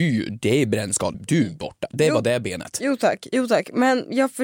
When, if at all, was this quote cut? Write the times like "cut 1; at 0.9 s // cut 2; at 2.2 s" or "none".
cut 1; at 1.1 s